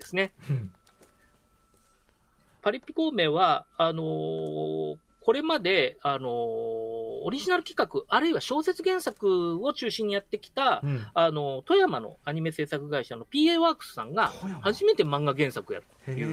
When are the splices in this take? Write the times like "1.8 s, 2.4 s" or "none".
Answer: none